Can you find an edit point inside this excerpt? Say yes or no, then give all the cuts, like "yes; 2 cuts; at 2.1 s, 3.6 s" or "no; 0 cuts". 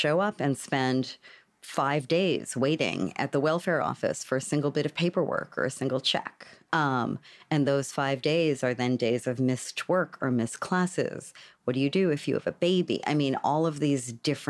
no; 0 cuts